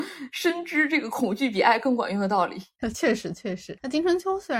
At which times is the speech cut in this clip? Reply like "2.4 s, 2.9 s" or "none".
none

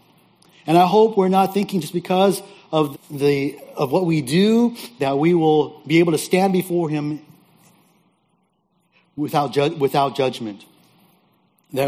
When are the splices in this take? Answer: 2.9 s

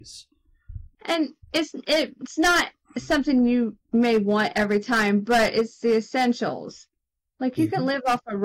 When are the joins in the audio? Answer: 0.9 s, 3.8 s

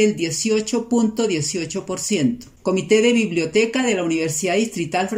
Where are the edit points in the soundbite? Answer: 2.6 s

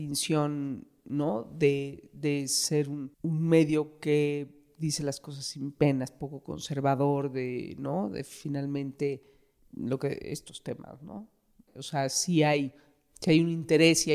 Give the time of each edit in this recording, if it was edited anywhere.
3.1 s, 9.6 s, 11.7 s

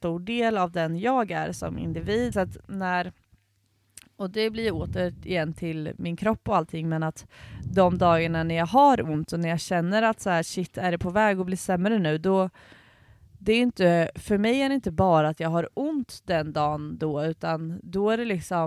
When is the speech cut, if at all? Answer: 2.3 s

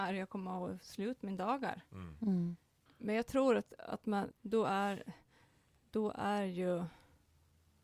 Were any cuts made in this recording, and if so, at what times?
2.9 s, 4.3 s

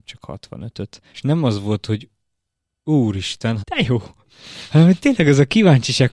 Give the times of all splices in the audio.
1.1 s, 3.6 s

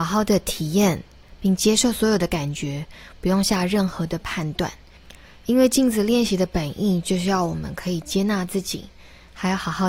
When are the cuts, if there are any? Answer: none

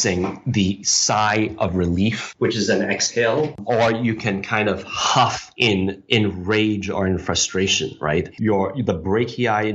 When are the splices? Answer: 8.4 s

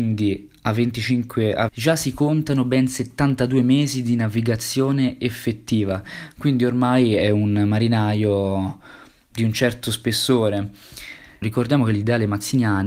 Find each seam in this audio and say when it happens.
1.7 s, 11.4 s

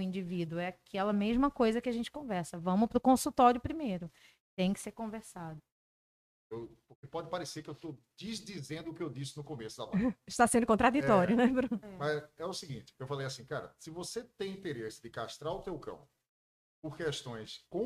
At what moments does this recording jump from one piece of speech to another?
5.6 s

